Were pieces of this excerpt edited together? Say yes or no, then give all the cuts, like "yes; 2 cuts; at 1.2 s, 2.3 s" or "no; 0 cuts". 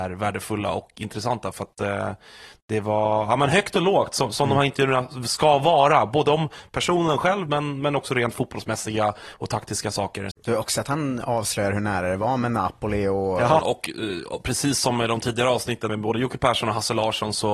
yes; 3 cuts; at 10.3 s, 13.6 s, 15.9 s